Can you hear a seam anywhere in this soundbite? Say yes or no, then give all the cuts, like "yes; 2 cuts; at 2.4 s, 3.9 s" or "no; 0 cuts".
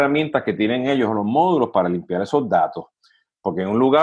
no; 0 cuts